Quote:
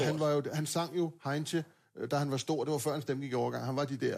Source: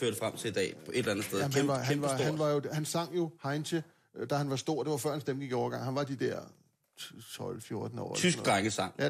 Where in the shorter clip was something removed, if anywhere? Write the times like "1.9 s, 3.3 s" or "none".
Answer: none